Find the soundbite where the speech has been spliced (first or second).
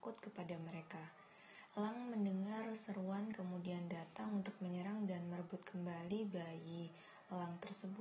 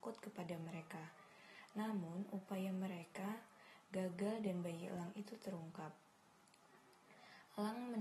first